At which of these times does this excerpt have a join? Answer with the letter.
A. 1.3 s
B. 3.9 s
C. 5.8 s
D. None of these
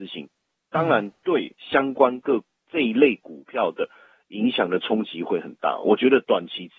D